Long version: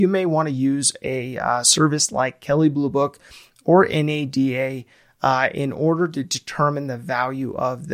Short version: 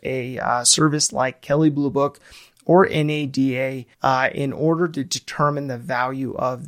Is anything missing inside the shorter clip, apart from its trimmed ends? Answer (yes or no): yes